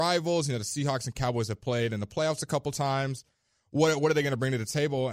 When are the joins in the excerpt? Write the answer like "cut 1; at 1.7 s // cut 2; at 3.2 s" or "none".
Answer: none